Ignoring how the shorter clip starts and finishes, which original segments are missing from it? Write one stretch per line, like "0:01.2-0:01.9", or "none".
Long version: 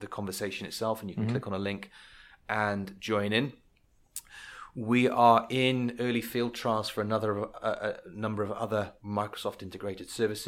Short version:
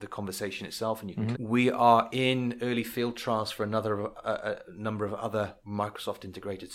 0:01.3-0:04.7